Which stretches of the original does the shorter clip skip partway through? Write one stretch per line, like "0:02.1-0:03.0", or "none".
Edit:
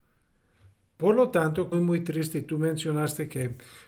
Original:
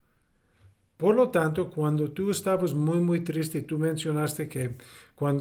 0:01.7-0:02.9

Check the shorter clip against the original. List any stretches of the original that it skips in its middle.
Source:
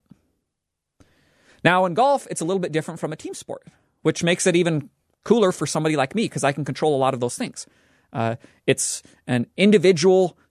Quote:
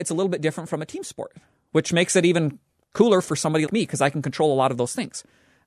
0:06.0-0:06.1

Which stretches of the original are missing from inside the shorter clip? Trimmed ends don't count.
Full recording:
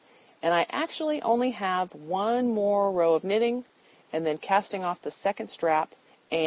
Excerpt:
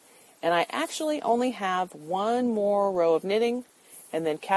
none

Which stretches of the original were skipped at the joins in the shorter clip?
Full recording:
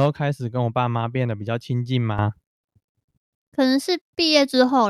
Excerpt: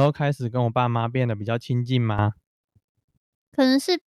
none

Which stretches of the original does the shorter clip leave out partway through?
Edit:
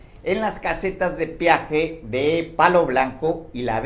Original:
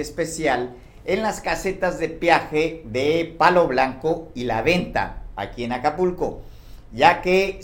none

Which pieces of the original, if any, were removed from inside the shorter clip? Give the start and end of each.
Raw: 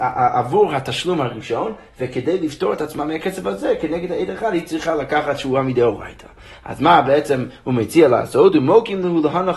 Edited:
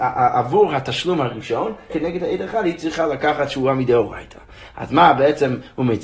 0:01.9-0:03.8

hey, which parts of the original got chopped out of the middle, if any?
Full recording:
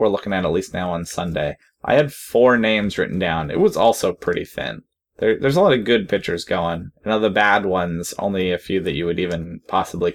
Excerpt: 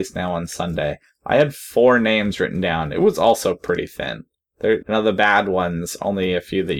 0:05.4-0:07.0

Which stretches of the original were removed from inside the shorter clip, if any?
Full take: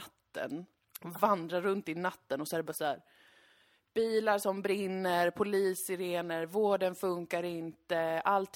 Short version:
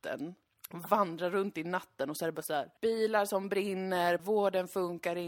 0:03.1-0:03.9
0:05.3-0:06.5

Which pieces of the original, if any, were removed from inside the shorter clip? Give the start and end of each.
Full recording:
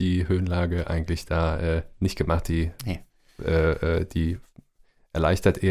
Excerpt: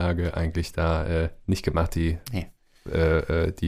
none

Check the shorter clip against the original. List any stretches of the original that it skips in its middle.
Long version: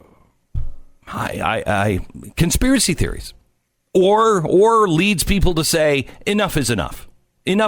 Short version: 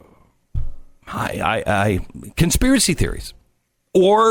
none

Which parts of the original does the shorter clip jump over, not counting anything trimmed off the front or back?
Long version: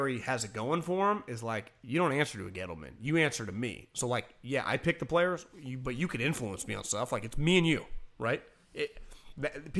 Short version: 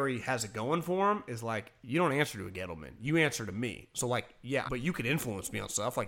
0:04.7-0:05.8

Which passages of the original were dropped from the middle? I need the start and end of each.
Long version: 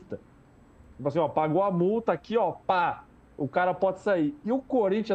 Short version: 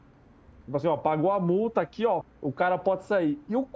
0:02.5-0:03.2

